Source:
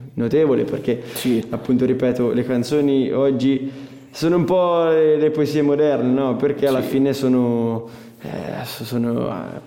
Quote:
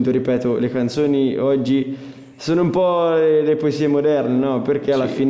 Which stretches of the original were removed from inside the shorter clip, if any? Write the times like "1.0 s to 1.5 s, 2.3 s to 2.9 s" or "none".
none